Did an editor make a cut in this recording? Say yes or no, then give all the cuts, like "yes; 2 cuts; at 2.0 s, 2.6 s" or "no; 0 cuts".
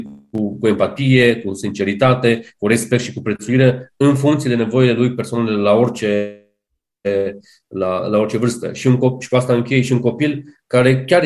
no; 0 cuts